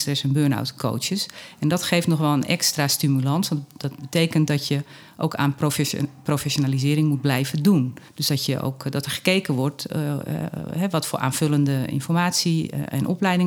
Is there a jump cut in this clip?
yes; 1 cut; at 8.1 s

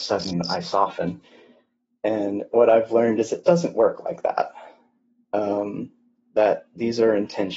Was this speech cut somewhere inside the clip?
no; 0 cuts

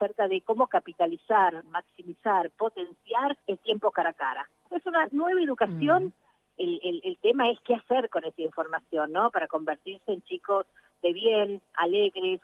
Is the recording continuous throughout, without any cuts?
no; 2 cuts; at 3.4 s, 6.2 s

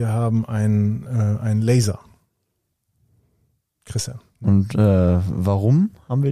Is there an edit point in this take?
no; 0 cuts

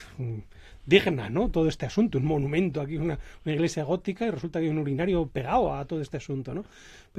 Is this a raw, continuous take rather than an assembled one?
yes; 0 cuts

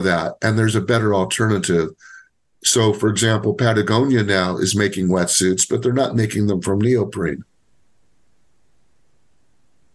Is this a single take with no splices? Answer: yes; 0 cuts

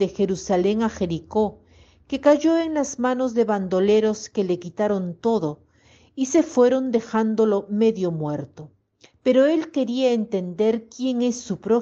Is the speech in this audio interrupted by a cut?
yes; 1 cut; at 9.1 s

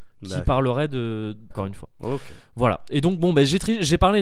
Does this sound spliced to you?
yes; 1 cut; at 1.5 s

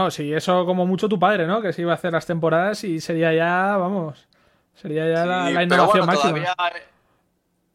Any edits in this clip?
no; 0 cuts

